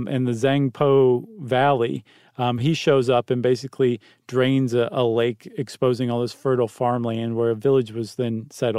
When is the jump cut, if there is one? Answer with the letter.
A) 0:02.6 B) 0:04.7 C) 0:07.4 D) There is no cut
D